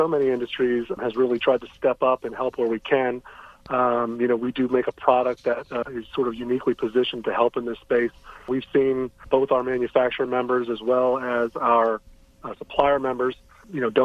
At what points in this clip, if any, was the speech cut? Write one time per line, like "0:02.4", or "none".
none